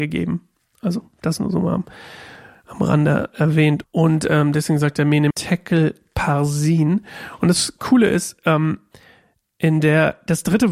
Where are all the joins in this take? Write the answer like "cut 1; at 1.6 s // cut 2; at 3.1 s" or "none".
cut 1; at 3.8 s // cut 2; at 5.3 s